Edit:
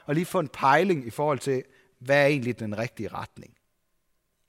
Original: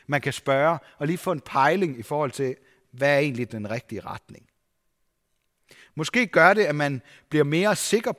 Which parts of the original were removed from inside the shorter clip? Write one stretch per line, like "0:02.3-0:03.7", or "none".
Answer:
none